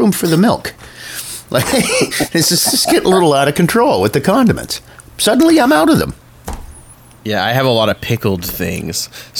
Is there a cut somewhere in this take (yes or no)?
no